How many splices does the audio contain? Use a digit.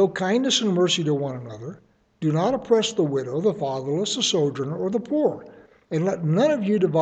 0